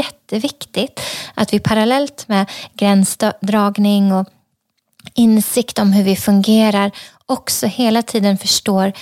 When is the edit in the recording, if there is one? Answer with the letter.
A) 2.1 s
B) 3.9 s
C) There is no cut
C